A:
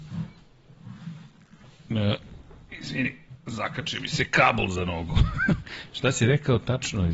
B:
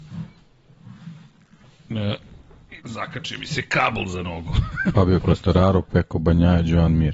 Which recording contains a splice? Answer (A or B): B